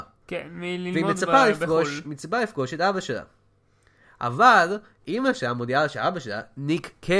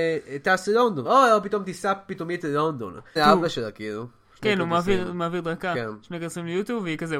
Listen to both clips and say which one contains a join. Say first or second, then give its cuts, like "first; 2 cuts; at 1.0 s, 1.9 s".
second; 2 cuts; at 1.0 s, 3.2 s